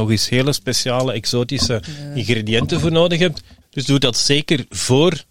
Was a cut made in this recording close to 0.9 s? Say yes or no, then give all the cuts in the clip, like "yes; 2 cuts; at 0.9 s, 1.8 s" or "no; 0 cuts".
no; 1 cut; at 3.6 s